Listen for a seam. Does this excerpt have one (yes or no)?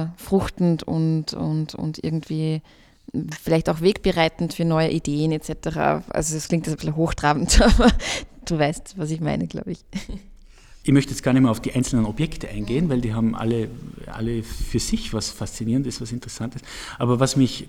no